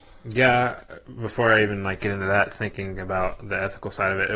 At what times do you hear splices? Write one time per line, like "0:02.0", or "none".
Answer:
none